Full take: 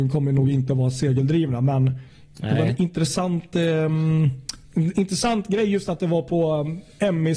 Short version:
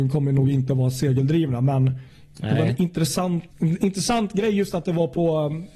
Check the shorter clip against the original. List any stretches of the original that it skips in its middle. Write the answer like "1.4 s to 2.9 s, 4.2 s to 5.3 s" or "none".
3.5 s to 4.6 s